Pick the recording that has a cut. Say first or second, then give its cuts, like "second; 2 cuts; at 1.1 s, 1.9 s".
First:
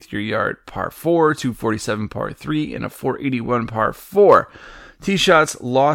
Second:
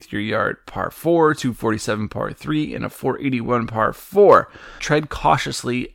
second; 1 cut; at 4.8 s